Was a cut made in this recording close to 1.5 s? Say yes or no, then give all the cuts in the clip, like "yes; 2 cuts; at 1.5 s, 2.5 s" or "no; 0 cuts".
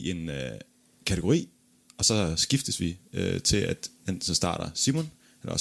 no; 1 cut; at 4.0 s